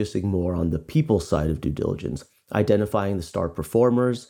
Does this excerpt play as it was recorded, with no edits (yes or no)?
yes